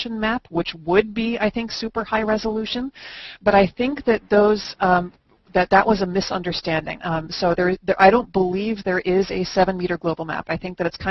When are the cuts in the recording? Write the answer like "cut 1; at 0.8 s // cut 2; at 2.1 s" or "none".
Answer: cut 1; at 7.0 s